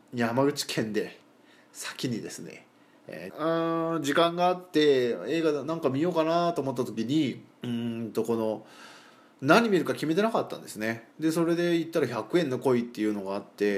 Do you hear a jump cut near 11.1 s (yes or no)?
yes